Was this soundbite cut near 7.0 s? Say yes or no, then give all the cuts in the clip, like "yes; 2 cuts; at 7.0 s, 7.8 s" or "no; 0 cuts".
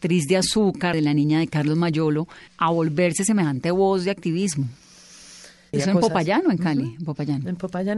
no; 3 cuts; at 0.9 s, 2.5 s, 5.7 s